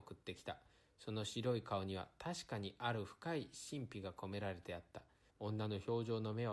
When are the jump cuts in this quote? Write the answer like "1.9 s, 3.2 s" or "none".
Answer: 5.3 s